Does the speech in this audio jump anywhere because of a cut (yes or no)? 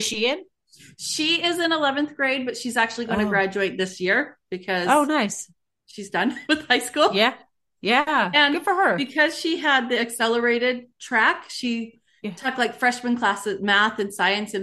no